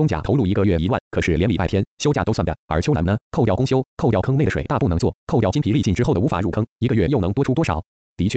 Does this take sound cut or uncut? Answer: uncut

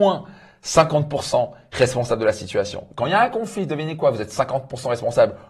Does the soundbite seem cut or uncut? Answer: uncut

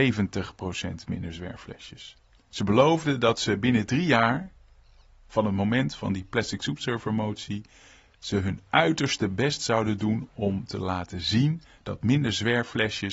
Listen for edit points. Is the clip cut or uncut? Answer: uncut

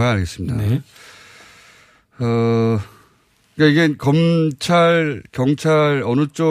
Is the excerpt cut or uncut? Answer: uncut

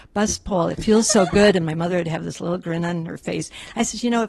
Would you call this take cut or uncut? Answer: uncut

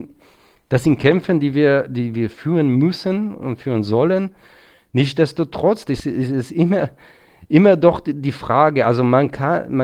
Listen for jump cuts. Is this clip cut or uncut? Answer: uncut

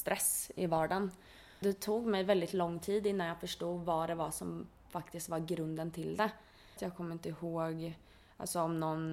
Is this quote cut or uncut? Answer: cut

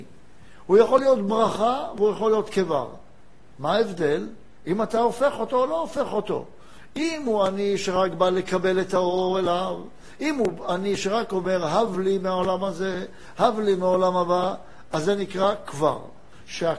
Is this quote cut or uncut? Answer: uncut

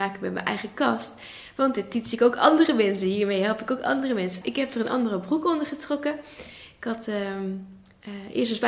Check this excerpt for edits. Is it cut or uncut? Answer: cut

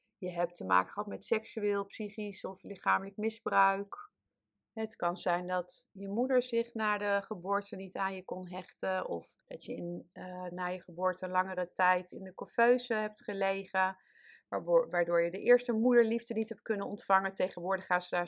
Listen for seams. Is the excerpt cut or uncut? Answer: cut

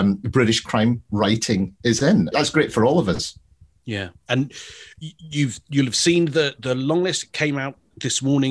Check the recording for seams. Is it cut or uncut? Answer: cut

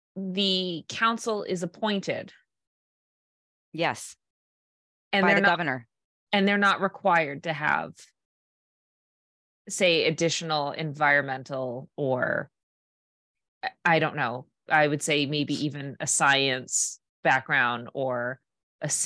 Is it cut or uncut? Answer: uncut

